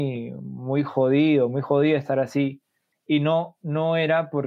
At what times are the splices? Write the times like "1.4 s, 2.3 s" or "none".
2.9 s